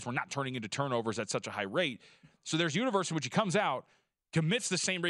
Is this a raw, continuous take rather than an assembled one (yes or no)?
yes